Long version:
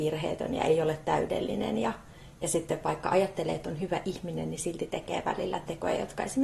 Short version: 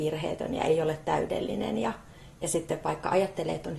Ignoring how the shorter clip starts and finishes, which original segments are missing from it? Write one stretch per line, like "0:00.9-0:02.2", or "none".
none